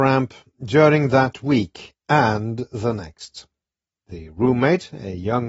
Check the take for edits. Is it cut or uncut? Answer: cut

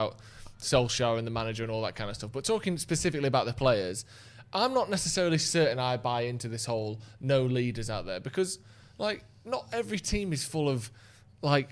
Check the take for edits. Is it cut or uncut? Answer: uncut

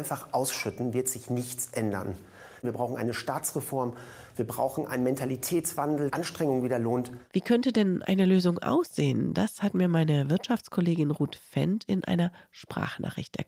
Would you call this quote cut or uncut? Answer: cut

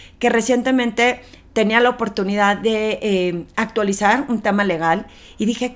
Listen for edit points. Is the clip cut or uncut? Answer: uncut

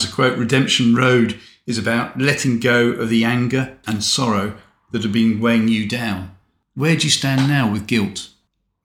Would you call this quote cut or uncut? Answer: cut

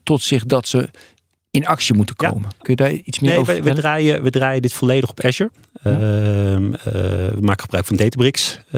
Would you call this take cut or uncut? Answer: cut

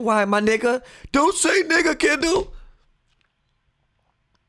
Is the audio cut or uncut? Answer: uncut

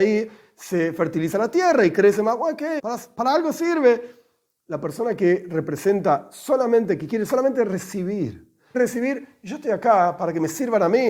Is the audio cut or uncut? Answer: cut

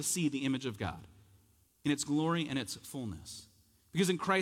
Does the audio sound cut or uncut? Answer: uncut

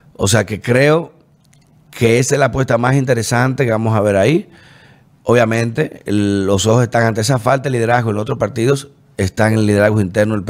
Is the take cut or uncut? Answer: uncut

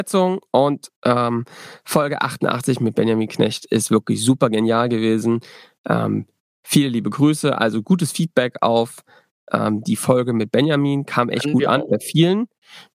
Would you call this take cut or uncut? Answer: uncut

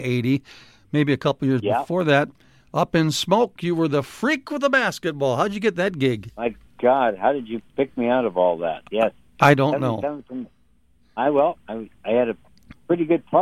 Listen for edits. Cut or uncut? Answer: uncut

